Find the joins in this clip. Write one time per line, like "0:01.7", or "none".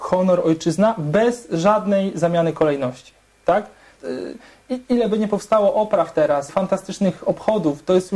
0:04.0
0:06.5